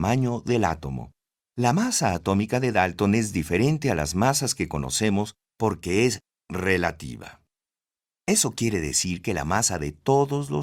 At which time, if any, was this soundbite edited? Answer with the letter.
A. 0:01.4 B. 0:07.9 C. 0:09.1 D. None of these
A